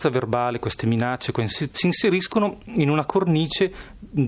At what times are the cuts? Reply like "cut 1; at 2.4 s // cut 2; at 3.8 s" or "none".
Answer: cut 1; at 1.7 s